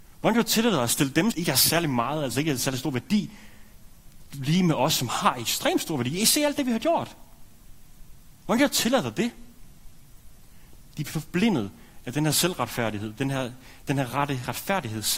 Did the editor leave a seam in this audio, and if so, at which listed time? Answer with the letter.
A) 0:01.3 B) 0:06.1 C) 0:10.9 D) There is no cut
A